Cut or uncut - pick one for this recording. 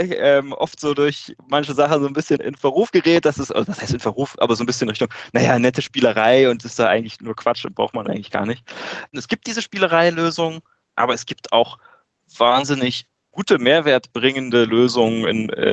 cut